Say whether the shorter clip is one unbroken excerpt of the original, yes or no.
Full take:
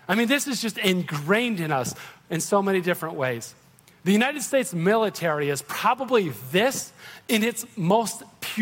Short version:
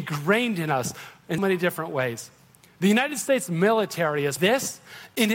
no